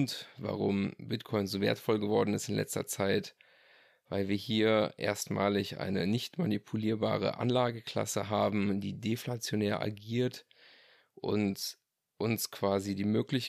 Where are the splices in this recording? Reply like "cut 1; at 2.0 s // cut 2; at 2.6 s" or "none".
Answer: none